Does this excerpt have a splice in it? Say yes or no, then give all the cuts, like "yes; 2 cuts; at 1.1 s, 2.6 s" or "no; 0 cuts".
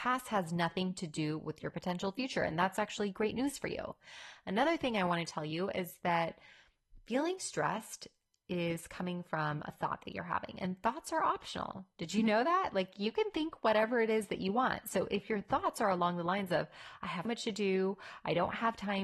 yes; 1 cut; at 17.2 s